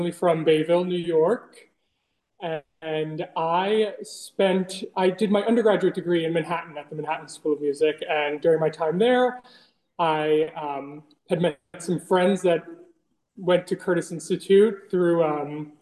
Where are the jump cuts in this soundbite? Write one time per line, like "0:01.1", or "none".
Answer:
none

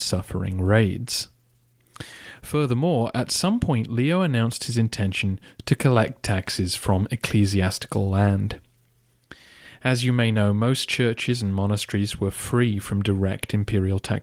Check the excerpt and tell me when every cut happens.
none

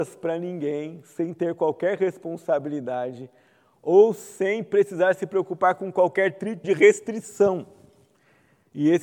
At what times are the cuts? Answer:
0:06.6

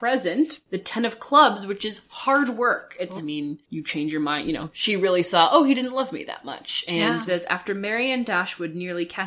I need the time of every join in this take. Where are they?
0:03.2
0:07.3

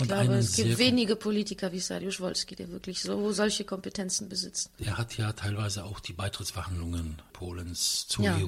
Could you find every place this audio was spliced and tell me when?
none

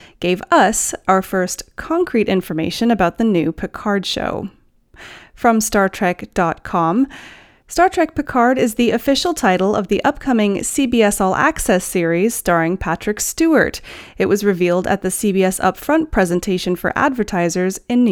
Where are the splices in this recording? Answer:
none

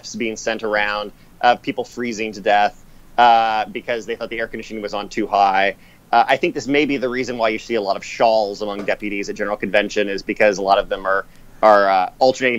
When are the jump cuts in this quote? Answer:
none

